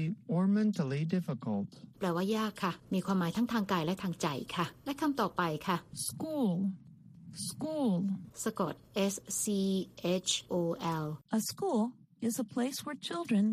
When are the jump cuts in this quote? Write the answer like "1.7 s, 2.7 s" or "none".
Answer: 10.5 s